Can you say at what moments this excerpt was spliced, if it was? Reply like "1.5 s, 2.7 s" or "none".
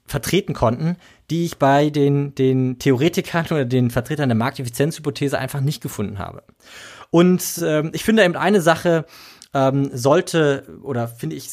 none